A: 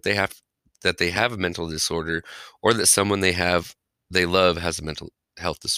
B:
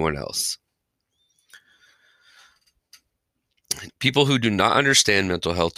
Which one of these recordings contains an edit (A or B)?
B